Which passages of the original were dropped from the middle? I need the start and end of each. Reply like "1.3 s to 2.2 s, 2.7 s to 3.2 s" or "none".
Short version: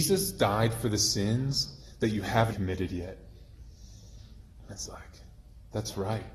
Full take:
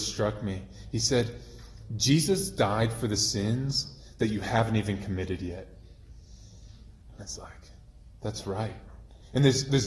4.7 s to 5.0 s